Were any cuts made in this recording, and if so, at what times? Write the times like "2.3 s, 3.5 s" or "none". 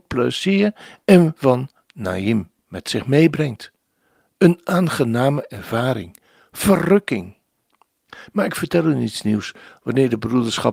2.6 s